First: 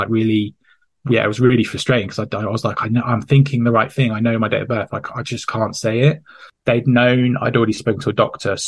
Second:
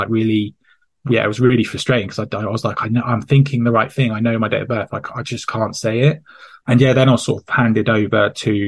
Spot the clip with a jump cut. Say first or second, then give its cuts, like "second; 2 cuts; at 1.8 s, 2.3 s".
first; 1 cut; at 6.5 s